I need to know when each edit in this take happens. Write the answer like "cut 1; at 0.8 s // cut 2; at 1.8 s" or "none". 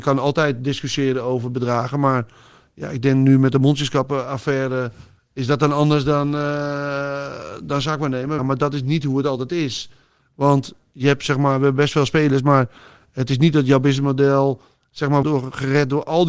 cut 1; at 8.4 s // cut 2; at 15.2 s